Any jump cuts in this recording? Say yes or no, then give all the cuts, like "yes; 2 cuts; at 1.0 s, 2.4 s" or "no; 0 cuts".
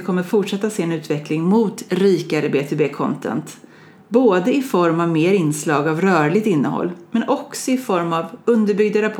no; 0 cuts